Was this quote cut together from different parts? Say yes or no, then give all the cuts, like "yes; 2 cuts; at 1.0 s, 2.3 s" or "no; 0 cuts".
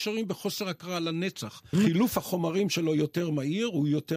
yes; 1 cut; at 1.7 s